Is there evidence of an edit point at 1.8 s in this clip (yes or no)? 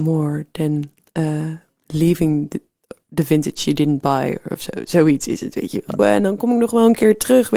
no